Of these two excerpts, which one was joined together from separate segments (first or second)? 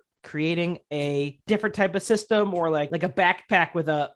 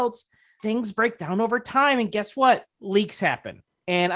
second